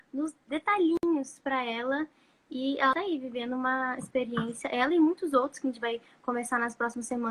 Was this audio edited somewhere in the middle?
no; 0 cuts

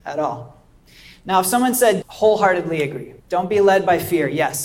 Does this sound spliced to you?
yes; 2 cuts; at 2.0 s, 3.2 s

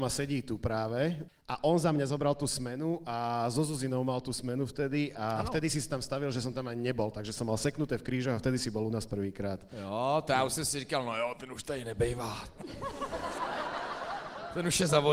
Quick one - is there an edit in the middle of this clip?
yes; 1 cut; at 1.3 s

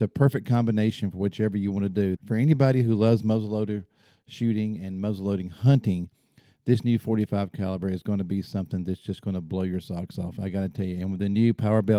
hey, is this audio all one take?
no; 1 cut; at 2.2 s

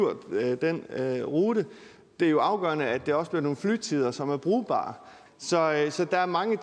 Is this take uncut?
no; 1 cut; at 5.3 s

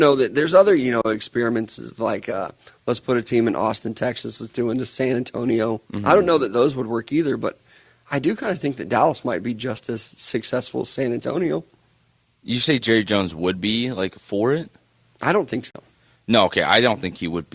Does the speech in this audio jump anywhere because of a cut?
yes; 1 cut; at 5.9 s

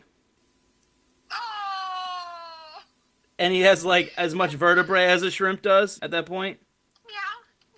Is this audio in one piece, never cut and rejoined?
no; 1 cut; at 6.0 s

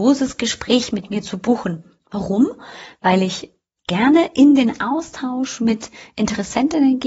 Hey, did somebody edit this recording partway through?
no; 0 cuts

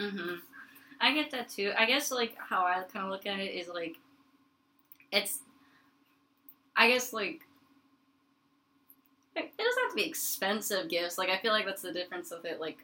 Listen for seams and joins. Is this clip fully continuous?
yes; 0 cuts

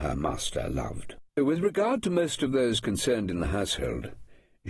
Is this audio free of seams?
no; 1 cut; at 1.3 s

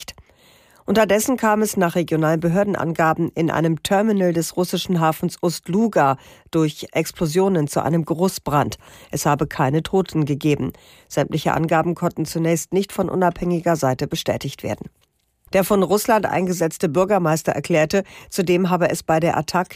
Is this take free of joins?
no; 2 cuts; at 10.9 s, 15.5 s

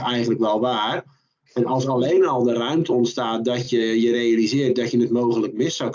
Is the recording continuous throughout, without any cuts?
yes; 0 cuts

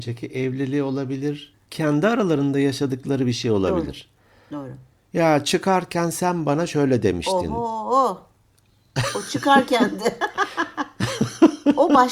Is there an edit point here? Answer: no; 0 cuts

